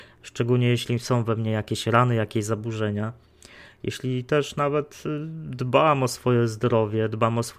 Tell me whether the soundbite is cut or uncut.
uncut